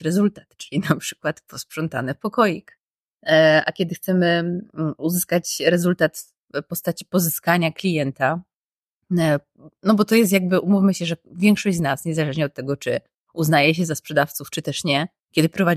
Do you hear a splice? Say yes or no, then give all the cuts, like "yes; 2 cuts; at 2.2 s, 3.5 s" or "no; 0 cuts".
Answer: no; 0 cuts